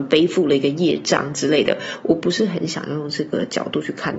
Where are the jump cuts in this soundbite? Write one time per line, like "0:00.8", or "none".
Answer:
none